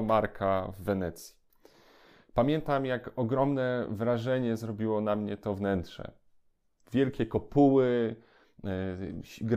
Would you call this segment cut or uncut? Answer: uncut